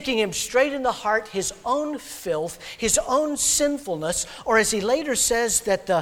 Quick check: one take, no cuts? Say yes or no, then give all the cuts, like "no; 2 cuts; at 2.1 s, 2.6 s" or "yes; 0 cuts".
yes; 0 cuts